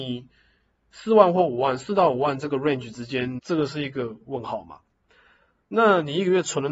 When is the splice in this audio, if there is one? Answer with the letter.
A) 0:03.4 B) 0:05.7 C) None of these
A